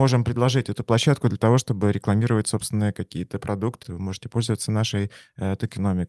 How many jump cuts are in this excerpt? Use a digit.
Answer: 1